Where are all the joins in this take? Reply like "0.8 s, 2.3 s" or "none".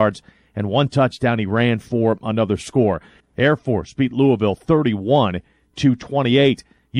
3.2 s